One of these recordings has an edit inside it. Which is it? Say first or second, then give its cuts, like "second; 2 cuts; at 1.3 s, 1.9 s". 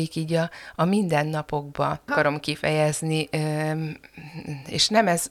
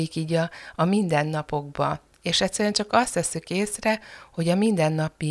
first; 1 cut; at 2.1 s